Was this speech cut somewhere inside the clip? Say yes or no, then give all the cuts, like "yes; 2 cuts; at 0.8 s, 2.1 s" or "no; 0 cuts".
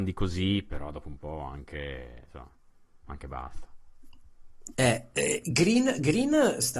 no; 0 cuts